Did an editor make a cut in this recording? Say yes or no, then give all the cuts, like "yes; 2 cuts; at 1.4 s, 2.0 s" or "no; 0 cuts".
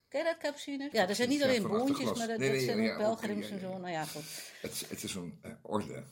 yes; 1 cut; at 0.9 s